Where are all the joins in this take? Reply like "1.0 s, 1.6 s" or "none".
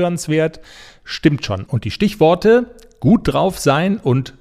1.7 s